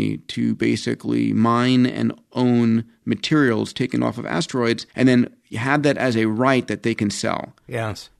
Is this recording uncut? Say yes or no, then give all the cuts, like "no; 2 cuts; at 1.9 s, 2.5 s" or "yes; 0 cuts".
no; 1 cut; at 4.9 s